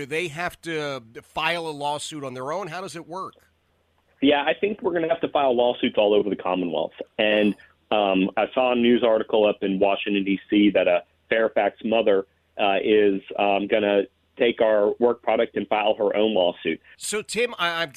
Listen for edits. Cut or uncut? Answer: cut